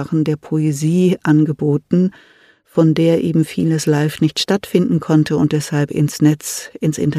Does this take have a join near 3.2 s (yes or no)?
no